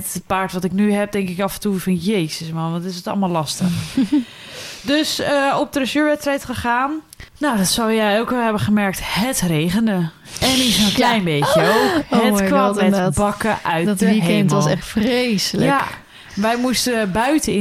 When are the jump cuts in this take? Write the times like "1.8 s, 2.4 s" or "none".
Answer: 7.3 s

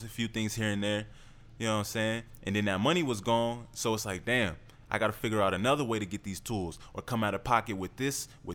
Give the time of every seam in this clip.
none

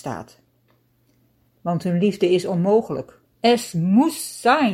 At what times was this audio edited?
3.3 s

